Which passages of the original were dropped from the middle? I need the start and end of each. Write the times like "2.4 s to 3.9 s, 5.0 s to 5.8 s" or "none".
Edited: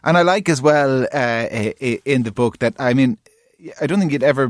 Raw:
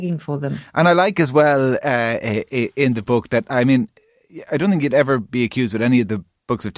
none